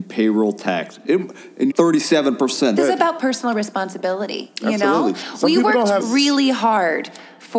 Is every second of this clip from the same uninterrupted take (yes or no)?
no